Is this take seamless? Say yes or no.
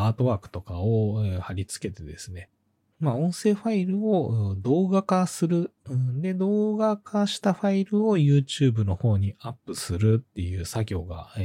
yes